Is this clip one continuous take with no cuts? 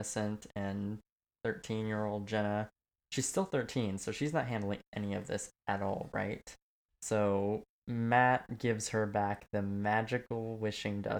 no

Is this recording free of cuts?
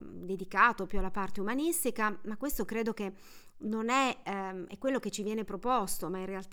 yes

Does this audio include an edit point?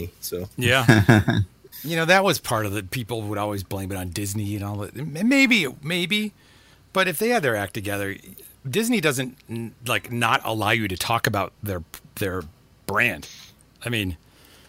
no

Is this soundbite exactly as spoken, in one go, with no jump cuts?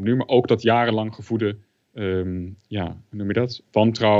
yes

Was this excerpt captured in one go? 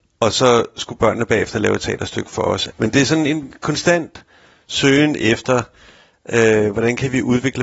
no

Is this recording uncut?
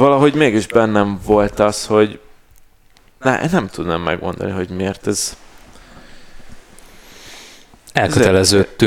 yes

